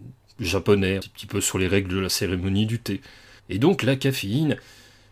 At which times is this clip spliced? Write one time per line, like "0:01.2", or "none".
0:01.0
0:03.4